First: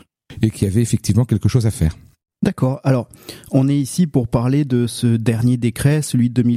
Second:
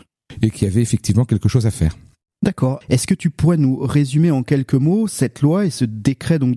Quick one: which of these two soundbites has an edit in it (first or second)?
second